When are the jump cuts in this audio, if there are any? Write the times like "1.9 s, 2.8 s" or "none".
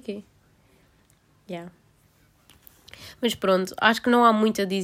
none